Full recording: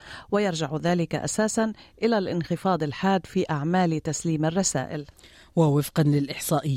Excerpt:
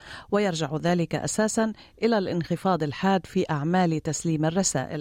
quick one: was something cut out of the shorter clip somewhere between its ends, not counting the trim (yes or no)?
no